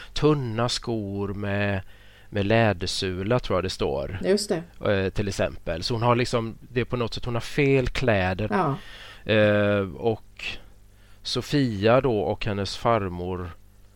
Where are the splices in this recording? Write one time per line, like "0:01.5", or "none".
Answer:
0:08.5